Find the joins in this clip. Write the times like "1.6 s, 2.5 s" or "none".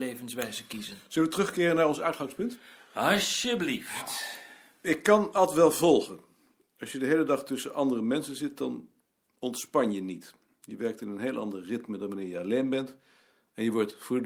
none

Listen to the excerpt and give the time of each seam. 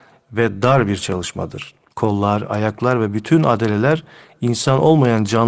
1.9 s

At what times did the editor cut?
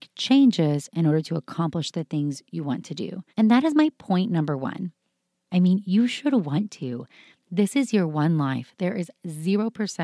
3.3 s, 5.5 s

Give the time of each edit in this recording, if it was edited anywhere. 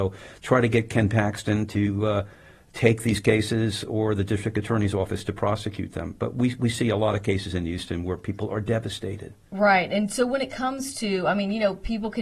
none

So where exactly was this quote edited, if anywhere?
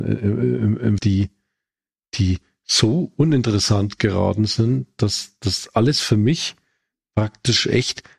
1.0 s

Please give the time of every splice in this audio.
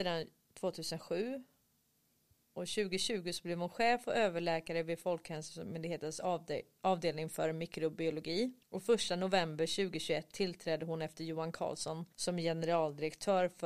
8.6 s, 12.1 s

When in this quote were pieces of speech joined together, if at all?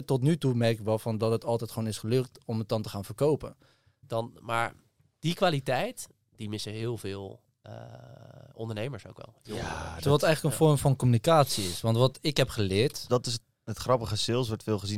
4.0 s, 13.1 s

